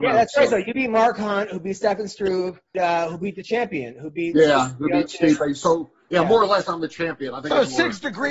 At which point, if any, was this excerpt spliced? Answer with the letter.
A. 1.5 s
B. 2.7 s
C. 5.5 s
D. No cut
B